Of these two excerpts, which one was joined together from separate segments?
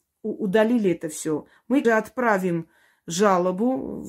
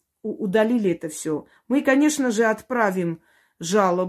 first; 1 cut; at 1.8 s

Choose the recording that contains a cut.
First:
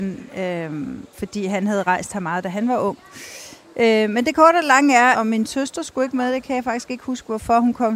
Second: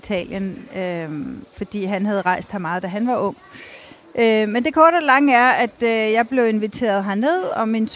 first; 1 cut; at 5.1 s

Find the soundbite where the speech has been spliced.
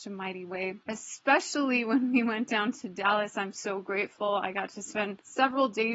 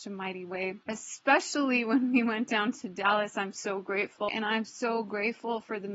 second; 1 cut; at 4.3 s

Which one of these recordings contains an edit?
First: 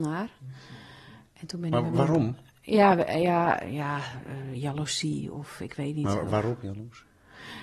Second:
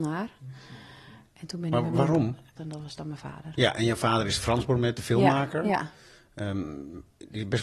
second; 1 cut; at 2.6 s

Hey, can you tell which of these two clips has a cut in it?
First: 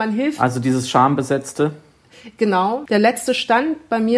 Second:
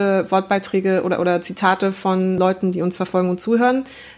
first; 1 cut; at 2.9 s

